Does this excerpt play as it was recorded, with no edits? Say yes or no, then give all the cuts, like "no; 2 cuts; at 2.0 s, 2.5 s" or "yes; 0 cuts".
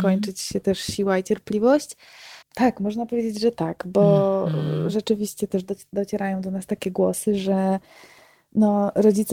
no; 1 cut; at 2.4 s